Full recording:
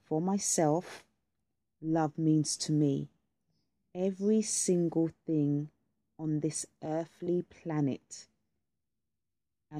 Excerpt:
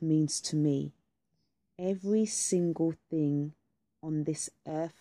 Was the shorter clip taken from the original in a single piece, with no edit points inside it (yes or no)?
yes